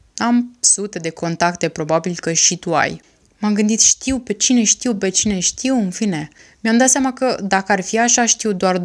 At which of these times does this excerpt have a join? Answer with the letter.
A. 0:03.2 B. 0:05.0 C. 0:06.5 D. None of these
D